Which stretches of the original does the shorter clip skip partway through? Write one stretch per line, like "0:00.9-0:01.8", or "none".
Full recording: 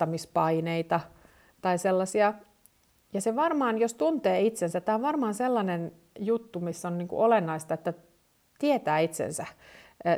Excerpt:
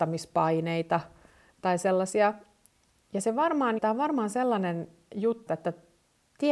0:03.8-0:04.8
0:06.5-0:07.7